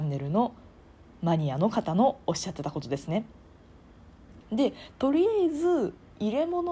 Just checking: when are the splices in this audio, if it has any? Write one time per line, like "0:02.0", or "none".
0:04.4